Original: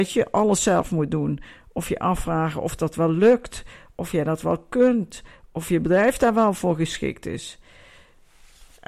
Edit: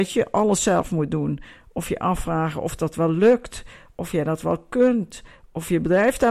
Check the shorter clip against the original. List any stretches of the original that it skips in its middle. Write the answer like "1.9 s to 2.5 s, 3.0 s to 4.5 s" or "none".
none